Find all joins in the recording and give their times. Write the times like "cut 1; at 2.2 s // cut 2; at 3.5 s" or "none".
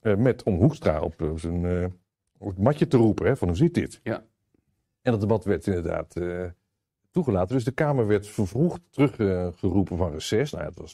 none